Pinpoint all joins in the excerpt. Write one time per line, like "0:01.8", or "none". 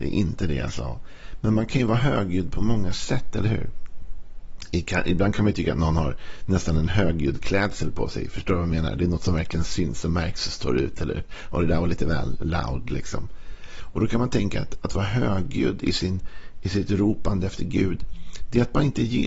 none